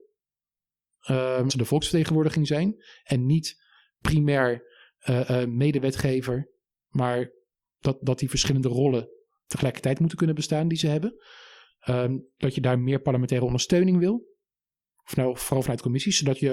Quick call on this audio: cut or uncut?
cut